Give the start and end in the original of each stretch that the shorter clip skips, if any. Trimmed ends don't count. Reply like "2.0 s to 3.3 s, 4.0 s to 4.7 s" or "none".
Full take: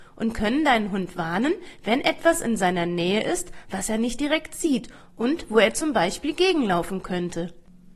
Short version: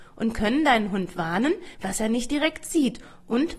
1.7 s to 3.6 s

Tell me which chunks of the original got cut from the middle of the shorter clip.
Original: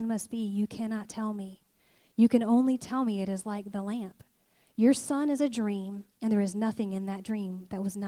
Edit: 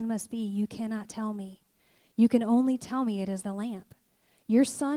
3.4 s to 3.7 s

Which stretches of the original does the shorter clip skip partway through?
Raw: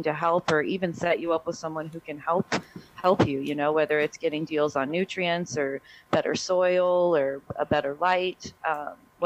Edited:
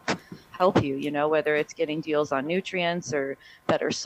none

